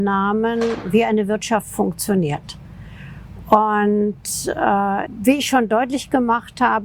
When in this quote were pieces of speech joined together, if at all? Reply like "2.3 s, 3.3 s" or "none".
5.1 s